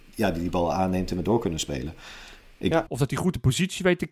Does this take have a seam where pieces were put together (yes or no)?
yes